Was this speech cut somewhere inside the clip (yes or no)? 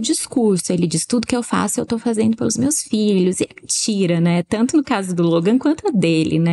no